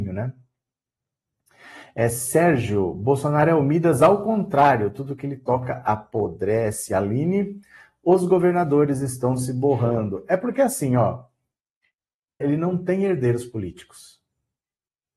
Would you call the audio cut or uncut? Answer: cut